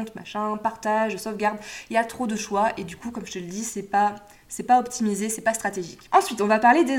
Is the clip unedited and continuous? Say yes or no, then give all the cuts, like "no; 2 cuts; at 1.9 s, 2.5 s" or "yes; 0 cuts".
yes; 0 cuts